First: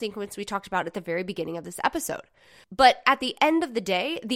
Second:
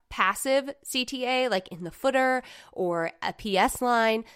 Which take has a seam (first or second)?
first